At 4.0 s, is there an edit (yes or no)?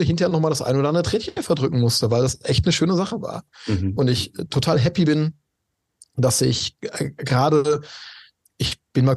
no